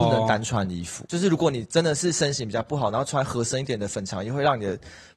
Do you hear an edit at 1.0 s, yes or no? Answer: yes